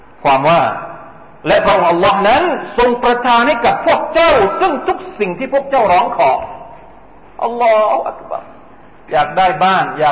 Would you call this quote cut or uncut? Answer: uncut